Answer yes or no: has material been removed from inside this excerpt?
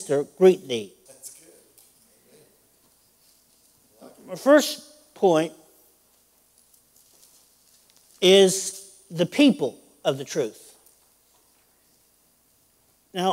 yes